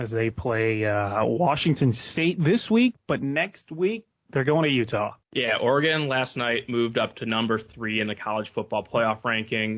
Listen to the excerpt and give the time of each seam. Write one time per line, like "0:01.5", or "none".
0:04.1
0:05.2